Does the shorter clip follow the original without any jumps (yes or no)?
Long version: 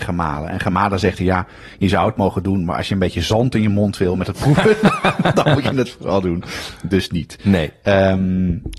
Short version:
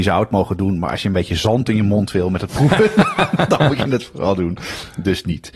yes